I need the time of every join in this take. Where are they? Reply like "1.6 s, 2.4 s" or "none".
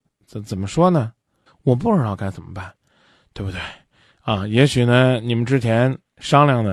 1.5 s